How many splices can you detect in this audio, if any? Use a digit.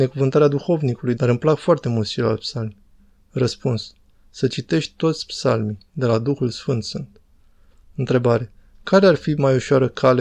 1